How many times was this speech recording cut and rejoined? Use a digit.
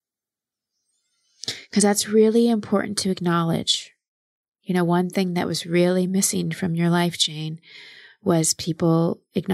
0